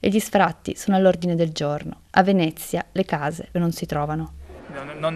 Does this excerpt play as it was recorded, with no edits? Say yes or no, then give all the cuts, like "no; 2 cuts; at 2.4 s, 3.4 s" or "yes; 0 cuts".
no; 2 cuts; at 2.0 s, 3.5 s